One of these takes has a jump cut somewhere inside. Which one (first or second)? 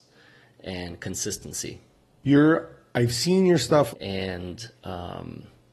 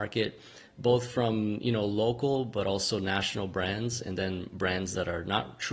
first